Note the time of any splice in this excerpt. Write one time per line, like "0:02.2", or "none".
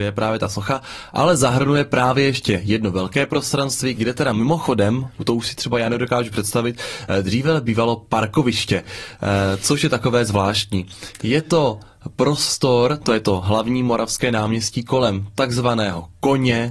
none